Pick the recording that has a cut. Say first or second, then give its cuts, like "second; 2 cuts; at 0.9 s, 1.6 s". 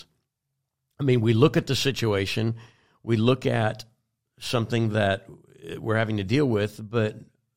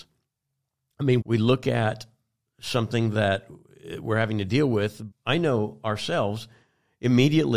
second; 2 cuts; at 1.2 s, 5.1 s